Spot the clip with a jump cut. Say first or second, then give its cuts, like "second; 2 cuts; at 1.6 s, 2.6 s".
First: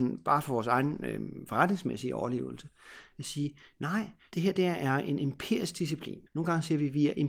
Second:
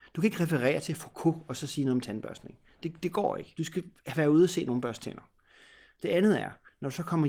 first; 1 cut; at 6.3 s